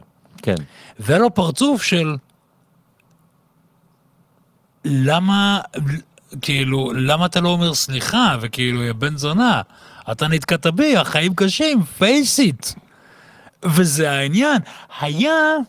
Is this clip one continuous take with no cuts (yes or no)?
yes